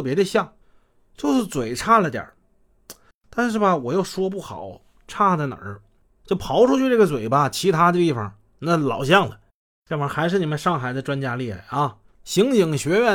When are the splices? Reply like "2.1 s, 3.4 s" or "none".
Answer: 12.0 s